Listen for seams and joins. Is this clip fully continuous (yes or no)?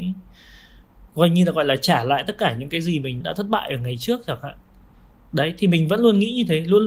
no